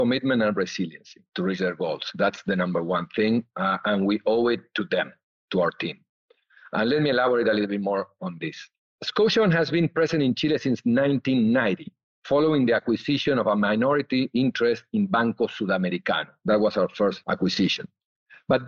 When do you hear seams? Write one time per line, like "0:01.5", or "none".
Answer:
none